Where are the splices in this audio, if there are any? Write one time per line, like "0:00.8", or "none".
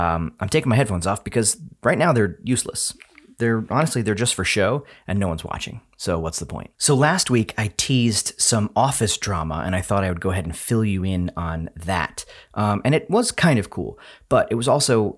0:06.7
0:12.4